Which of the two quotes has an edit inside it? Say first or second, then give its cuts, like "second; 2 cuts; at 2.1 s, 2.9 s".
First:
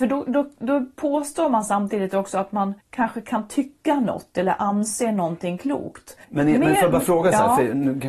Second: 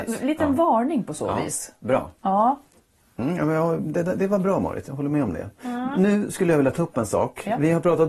first; 2 cuts; at 2.8 s, 6.2 s